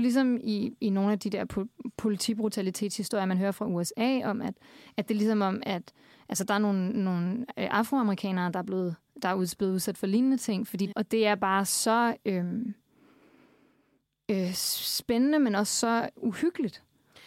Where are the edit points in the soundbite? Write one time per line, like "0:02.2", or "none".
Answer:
0:10.9